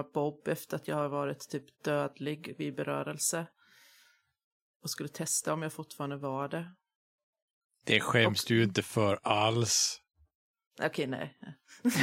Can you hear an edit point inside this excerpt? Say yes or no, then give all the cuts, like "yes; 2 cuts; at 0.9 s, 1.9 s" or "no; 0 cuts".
no; 0 cuts